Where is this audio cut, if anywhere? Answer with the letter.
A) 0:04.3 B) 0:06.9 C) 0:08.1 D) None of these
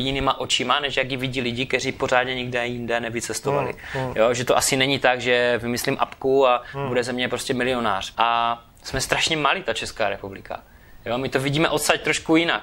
C